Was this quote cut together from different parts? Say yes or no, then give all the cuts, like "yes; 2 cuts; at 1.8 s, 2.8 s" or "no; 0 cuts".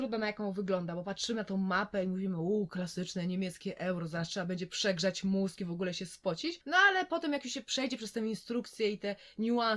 no; 0 cuts